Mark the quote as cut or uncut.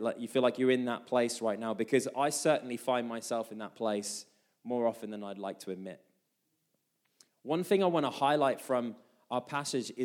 uncut